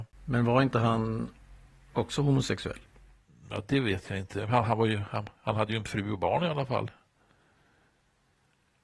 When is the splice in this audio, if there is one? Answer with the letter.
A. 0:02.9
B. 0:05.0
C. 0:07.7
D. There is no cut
D